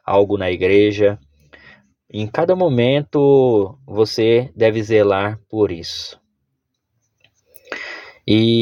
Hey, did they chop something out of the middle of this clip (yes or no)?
no